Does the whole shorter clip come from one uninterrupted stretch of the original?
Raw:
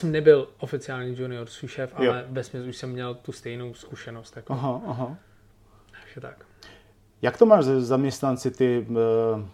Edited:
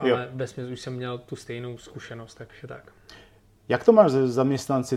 no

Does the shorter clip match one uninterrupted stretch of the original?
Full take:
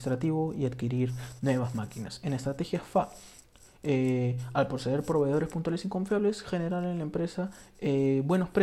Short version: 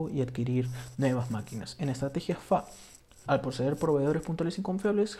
no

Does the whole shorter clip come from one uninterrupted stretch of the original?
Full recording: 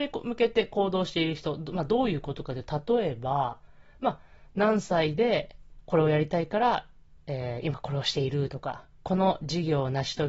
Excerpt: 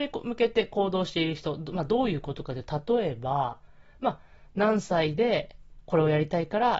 yes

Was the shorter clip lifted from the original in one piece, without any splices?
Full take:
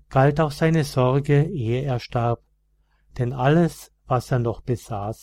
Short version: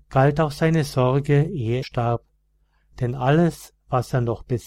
no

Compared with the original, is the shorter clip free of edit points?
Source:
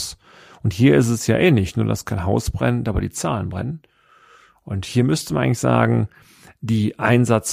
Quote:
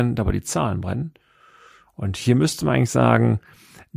yes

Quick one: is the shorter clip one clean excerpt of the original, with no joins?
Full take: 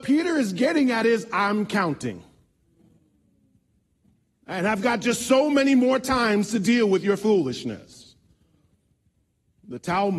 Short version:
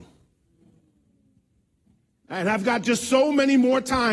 yes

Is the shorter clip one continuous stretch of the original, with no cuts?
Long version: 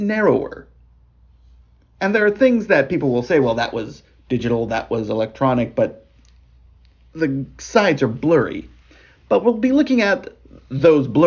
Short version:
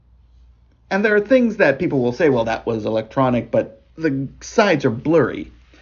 no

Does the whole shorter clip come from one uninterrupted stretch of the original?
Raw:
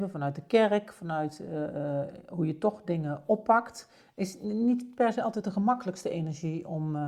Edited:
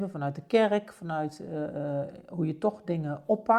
yes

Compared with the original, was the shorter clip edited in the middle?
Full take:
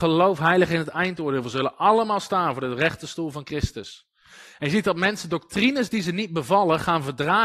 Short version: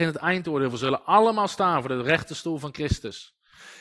no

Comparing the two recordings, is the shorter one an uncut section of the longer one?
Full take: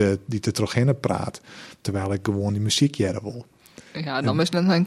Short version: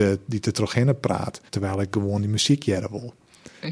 no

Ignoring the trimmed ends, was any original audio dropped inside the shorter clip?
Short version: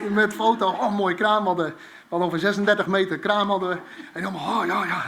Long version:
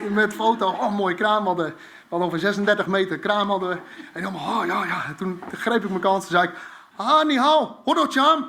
no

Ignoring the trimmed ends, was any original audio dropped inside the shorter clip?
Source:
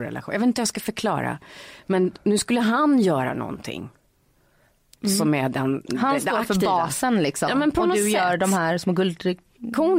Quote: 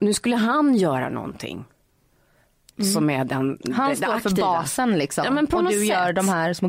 no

